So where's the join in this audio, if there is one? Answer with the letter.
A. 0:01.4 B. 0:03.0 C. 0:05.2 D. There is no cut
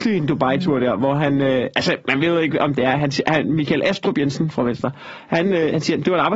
D